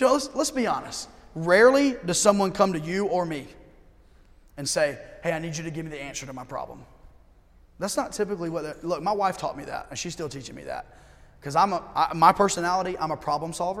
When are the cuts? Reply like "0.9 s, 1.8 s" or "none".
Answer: 7.6 s